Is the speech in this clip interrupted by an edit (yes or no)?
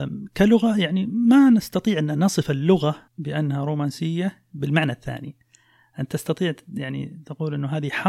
yes